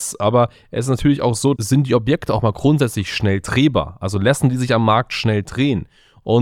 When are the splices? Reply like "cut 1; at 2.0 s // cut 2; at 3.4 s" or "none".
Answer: cut 1; at 1.6 s